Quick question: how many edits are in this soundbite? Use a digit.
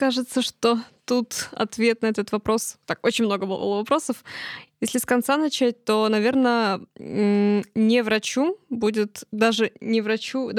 0